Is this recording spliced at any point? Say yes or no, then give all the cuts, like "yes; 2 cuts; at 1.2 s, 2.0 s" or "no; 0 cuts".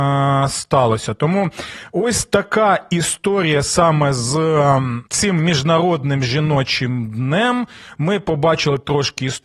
yes; 1 cut; at 5.1 s